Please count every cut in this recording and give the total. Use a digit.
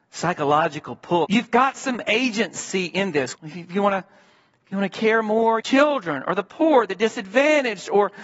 3